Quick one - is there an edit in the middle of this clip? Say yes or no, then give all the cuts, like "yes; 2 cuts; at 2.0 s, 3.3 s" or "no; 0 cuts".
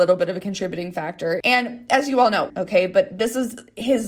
yes; 2 cuts; at 1.4 s, 2.5 s